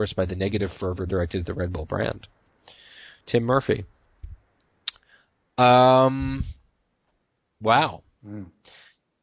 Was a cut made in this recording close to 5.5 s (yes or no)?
no